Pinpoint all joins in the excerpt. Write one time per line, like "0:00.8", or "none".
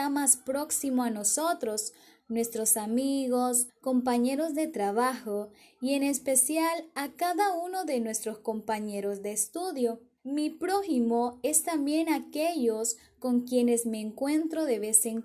0:02.2
0:03.7
0:10.2